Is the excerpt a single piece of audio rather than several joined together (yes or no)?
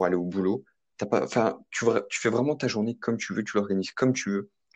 no